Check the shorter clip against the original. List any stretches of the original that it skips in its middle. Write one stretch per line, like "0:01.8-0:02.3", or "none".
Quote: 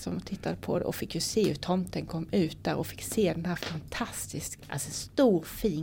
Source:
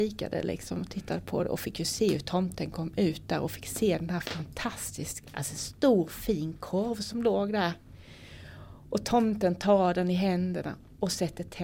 none